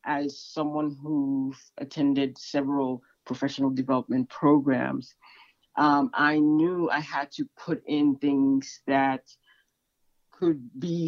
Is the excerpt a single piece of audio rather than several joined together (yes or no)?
yes